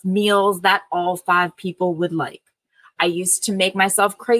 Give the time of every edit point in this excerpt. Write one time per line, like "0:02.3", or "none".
none